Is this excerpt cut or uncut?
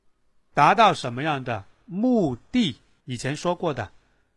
cut